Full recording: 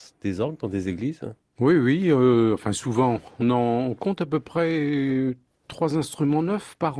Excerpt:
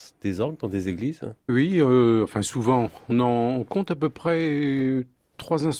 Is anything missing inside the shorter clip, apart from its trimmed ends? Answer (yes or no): yes